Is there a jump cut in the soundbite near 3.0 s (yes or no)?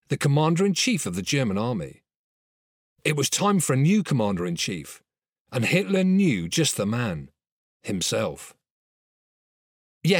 no